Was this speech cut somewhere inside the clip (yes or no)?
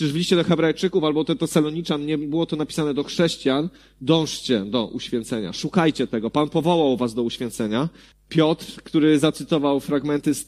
yes